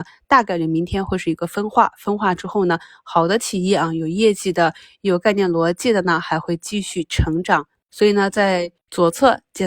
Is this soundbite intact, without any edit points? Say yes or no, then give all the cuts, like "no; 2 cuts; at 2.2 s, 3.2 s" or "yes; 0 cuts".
no; 1 cut; at 8.8 s